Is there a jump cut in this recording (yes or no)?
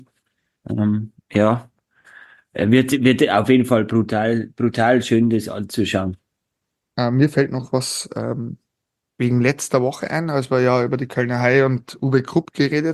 no